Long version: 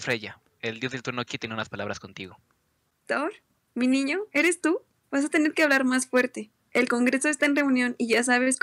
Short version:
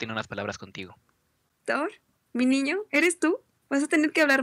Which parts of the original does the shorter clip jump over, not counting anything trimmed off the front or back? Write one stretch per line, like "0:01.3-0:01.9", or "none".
none